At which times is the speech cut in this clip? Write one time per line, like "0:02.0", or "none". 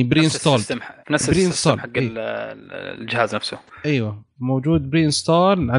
0:01.0